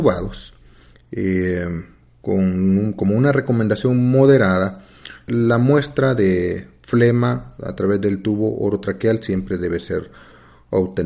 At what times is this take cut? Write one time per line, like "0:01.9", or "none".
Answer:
0:05.3

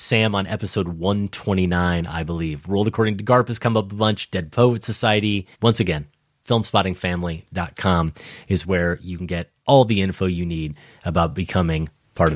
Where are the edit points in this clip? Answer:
0:05.5
0:09.6

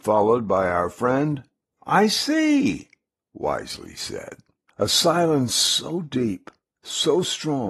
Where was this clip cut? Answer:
0:04.7

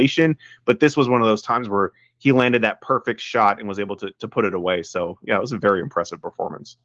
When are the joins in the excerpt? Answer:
none

